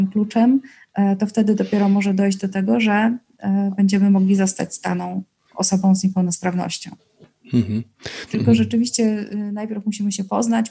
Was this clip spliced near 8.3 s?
yes; 1 cut; at 8.3 s

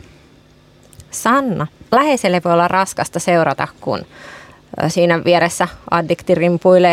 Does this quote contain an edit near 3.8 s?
no; 1 cut; at 1.9 s

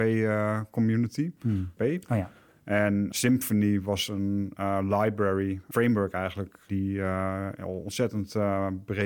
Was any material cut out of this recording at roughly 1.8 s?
yes; 1 cut; at 1.8 s

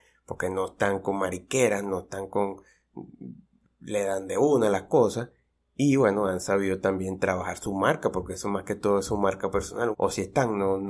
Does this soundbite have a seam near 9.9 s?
yes; 1 cut; at 9.9 s

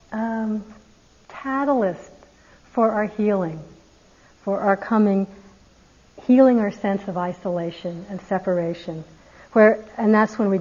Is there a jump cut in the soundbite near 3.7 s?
no; 0 cuts

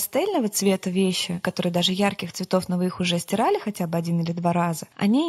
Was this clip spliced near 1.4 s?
yes; 1 cut; at 1.4 s

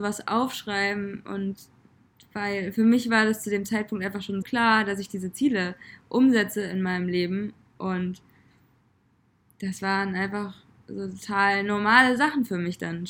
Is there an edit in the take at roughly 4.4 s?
yes; 1 cut; at 4.4 s

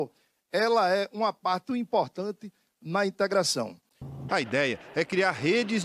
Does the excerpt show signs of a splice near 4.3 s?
yes; 2 cuts; at 1.7 s, 4.3 s

